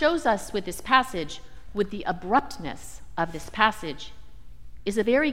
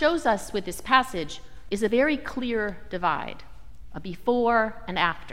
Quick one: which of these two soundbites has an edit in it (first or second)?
second